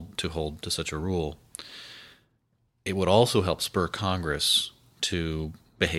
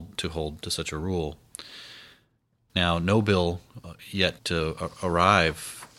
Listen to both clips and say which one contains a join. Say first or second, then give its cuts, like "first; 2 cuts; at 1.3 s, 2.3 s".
second; 2 cuts; at 2.7 s, 4.4 s